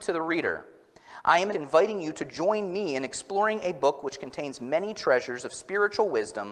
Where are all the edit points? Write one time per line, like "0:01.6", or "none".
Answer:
0:01.5